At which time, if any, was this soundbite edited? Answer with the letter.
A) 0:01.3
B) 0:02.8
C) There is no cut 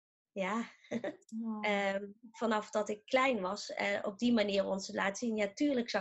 A